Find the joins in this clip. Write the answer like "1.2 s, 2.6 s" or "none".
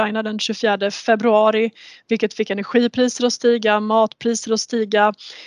none